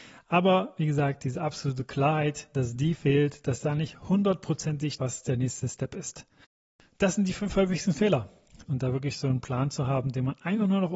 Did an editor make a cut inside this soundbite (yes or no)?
yes